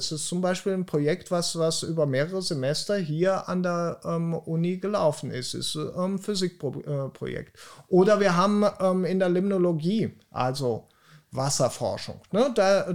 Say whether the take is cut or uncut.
uncut